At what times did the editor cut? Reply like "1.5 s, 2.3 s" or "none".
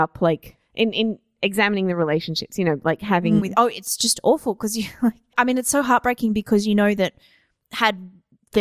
3.4 s, 5.3 s